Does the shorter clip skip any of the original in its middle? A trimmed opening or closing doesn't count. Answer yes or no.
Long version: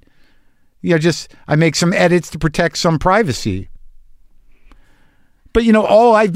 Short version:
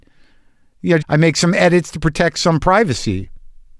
yes